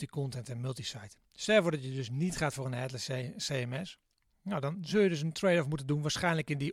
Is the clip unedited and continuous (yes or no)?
yes